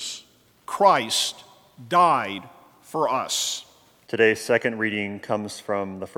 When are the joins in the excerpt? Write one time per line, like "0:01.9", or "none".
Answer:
0:04.0